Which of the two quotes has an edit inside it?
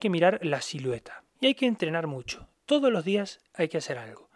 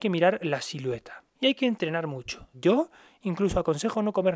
second; 1 cut; at 2.5 s

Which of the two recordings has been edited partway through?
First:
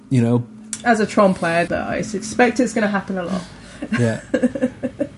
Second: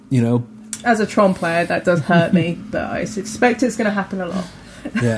first; 1 cut; at 1.7 s

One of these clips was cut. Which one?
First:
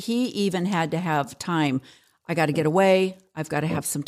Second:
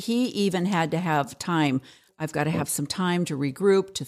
second; 1 cut; at 2.1 s

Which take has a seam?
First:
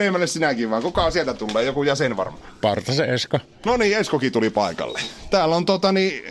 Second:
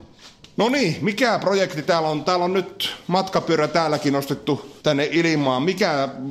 second; 1 cut; at 4.8 s

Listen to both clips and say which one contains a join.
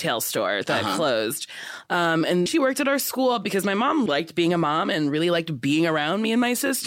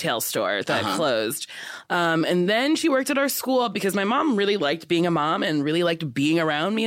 first; 2 cuts; at 2.5 s, 4.1 s

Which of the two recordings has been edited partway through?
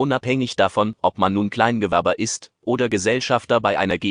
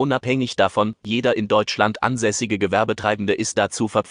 second; 1 cut; at 1.0 s

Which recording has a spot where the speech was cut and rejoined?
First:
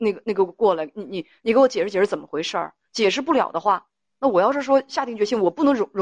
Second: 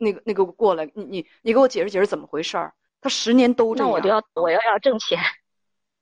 second; 2 cuts; at 2.9 s, 4.4 s

